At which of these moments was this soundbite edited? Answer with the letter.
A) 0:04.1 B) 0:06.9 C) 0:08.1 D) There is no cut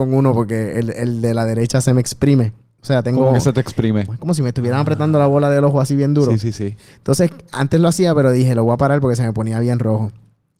A